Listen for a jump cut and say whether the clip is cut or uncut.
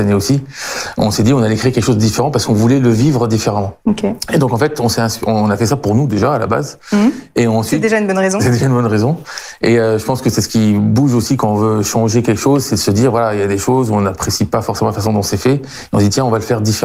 cut